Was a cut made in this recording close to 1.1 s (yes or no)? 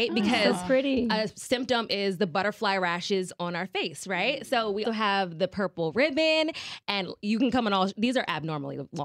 no